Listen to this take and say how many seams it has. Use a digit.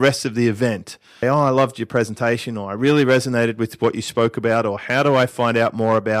1